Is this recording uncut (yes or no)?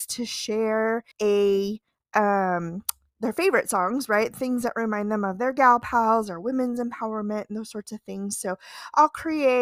no